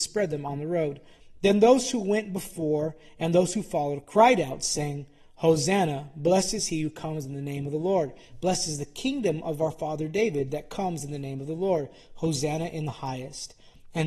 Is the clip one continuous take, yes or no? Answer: yes